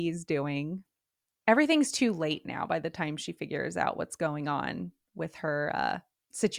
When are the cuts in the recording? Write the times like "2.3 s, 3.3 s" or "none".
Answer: none

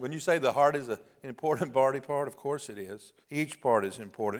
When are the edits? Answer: 3.2 s

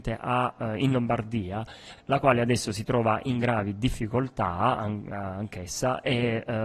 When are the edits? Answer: 2.0 s

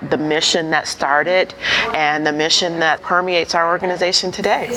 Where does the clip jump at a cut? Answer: 3.0 s

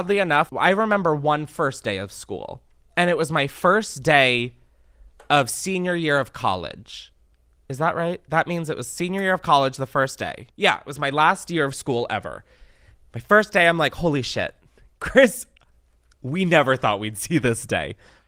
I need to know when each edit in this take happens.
none

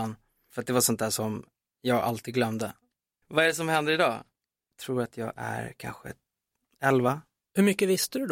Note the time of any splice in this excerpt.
3.2 s

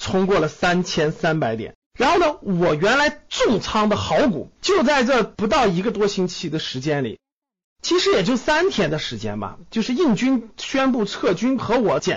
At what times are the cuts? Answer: 1.8 s, 4.6 s

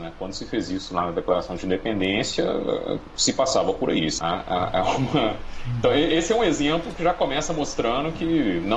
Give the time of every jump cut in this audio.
4.2 s

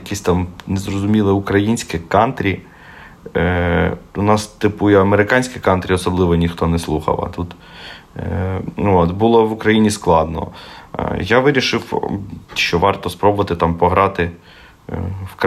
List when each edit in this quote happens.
12.4 s

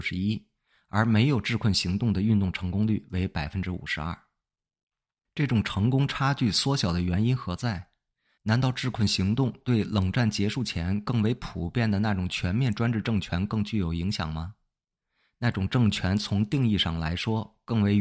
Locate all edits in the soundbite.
none

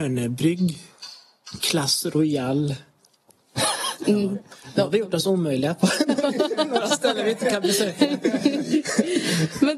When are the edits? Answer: none

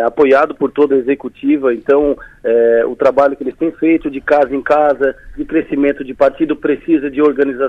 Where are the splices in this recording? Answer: 6.1 s

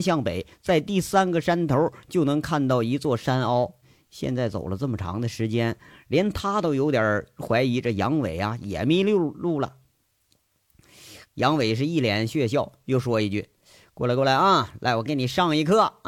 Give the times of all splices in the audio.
3.8 s, 11.2 s

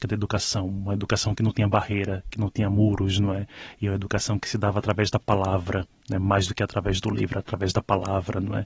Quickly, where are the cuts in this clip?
none

